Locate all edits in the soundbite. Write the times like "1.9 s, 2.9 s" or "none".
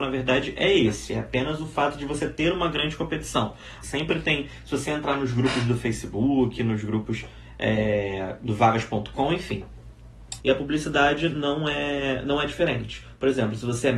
3.8 s, 10.4 s